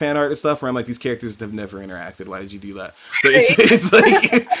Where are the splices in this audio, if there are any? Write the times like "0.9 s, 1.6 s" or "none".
none